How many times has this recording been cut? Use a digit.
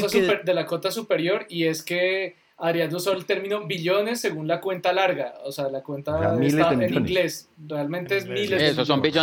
0